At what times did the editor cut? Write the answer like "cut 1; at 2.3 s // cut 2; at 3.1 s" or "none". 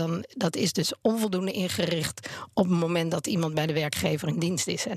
none